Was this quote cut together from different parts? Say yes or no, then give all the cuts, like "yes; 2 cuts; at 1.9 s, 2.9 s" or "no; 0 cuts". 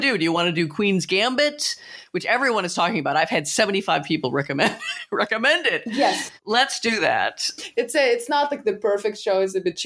no; 0 cuts